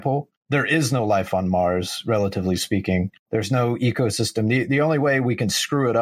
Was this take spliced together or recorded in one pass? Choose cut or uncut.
uncut